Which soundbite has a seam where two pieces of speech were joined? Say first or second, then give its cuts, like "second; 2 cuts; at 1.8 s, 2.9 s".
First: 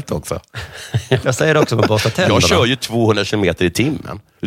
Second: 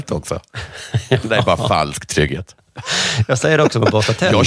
first; 1 cut; at 1.2 s